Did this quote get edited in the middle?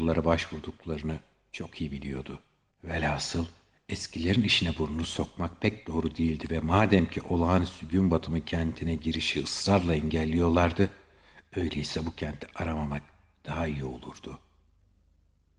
yes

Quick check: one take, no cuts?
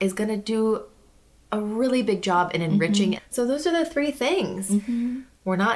no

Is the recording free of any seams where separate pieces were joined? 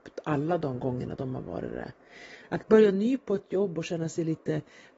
no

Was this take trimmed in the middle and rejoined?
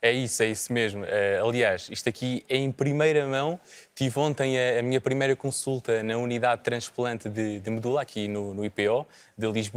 no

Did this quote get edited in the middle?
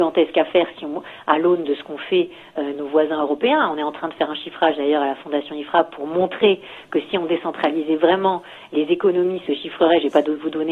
yes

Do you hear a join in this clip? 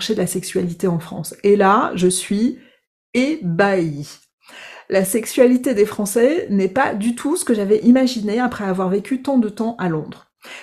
no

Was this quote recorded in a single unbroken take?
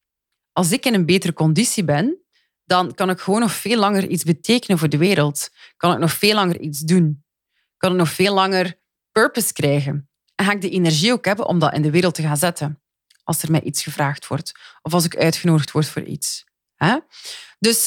yes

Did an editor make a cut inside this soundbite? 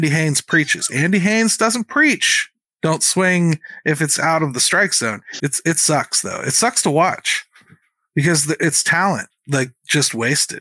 yes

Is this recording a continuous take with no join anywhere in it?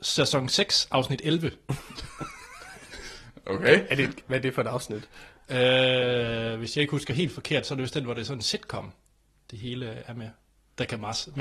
no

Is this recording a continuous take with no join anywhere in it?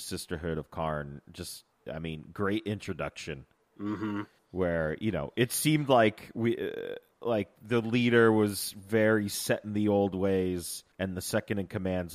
no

